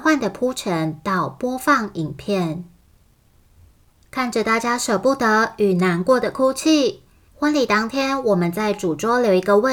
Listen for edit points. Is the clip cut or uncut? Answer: cut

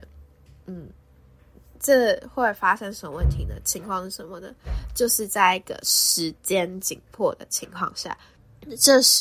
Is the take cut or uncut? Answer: uncut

